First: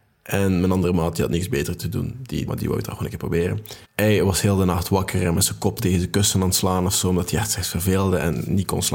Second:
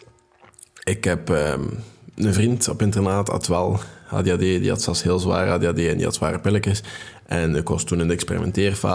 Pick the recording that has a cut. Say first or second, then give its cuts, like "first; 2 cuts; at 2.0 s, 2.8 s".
first; 2 cuts; at 2.5 s, 3.8 s